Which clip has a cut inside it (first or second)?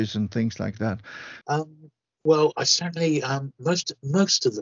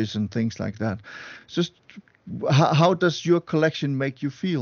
first